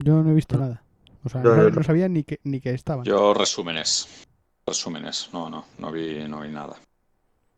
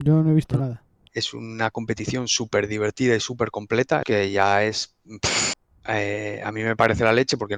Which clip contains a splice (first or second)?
second